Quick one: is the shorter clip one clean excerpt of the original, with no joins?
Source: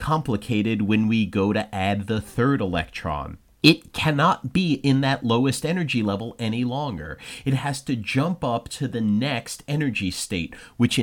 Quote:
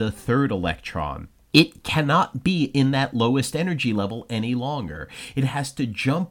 yes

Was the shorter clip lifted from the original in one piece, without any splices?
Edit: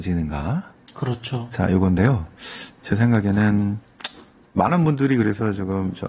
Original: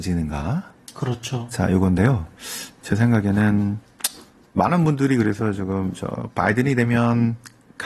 yes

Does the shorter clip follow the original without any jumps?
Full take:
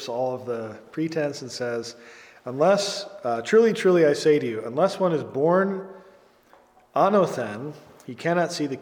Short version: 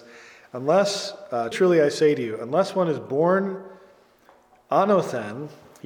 no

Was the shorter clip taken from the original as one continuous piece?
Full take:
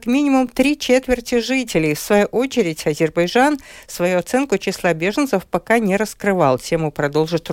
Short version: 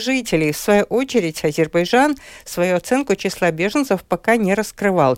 yes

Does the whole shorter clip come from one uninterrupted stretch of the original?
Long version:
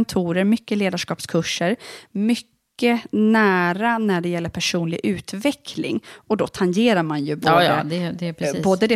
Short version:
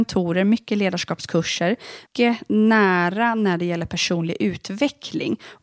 no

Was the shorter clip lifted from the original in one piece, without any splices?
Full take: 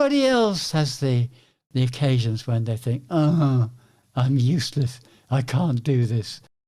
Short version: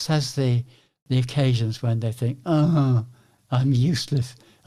yes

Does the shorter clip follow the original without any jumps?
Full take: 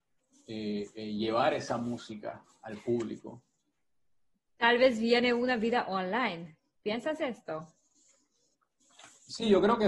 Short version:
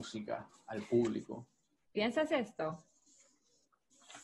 no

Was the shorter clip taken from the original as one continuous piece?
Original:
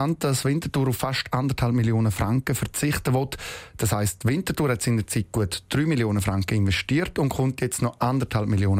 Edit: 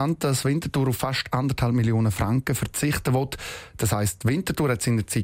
yes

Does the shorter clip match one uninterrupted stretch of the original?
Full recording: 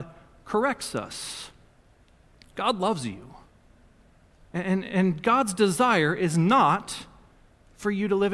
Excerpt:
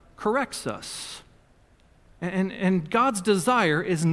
no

